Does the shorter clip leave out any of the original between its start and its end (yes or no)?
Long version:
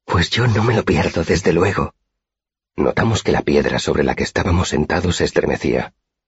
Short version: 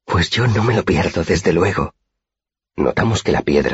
no